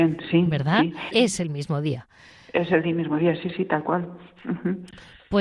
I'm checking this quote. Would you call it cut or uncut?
cut